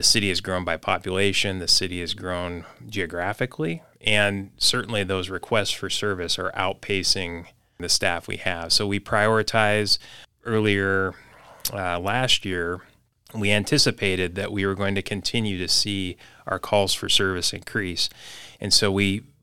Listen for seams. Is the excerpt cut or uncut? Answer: uncut